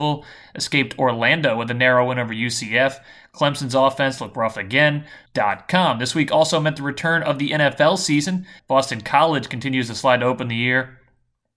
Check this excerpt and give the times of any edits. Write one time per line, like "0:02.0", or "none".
0:05.3
0:08.6